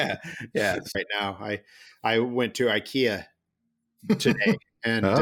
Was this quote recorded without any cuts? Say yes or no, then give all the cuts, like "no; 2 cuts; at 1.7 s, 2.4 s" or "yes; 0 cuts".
no; 1 cut; at 0.9 s